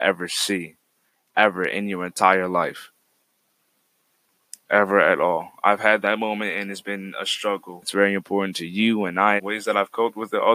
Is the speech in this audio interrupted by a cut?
yes; 2 cuts; at 7.8 s, 9.4 s

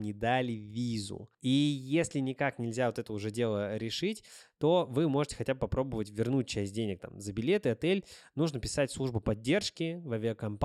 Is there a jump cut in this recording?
no; 0 cuts

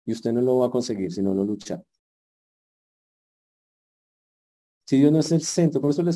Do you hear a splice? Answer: no; 0 cuts

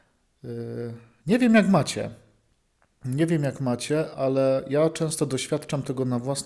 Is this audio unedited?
yes; 0 cuts

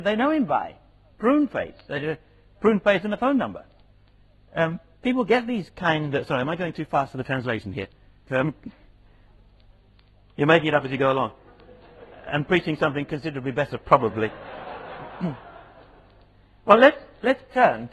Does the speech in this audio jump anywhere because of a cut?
no; 0 cuts

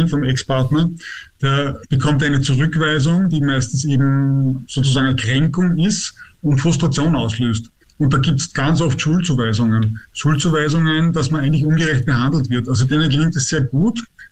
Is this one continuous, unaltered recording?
yes; 0 cuts

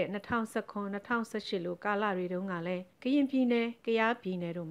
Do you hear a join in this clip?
yes; 1 cut; at 2.9 s

